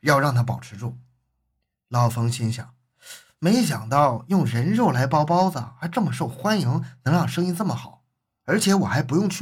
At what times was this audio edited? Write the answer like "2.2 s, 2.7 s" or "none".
none

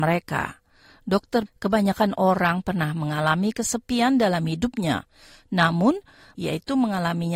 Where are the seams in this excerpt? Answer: 1.5 s, 6.4 s

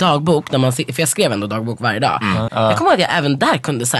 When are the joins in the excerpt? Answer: 2.5 s

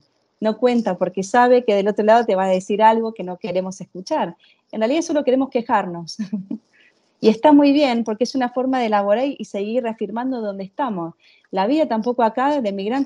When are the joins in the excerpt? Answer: none

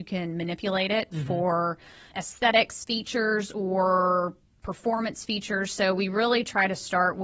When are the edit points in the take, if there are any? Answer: 2.1 s

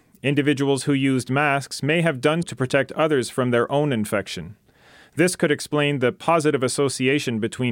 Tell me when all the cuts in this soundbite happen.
2.4 s

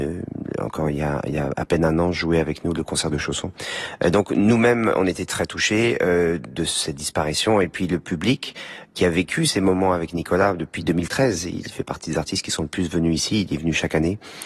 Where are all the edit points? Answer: none

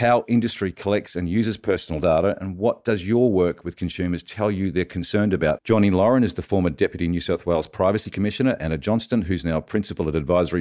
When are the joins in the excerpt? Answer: 5.6 s

